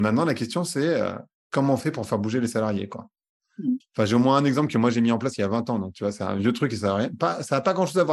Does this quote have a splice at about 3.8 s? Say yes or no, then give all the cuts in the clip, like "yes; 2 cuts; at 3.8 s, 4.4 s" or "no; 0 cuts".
yes; 1 cut; at 3.8 s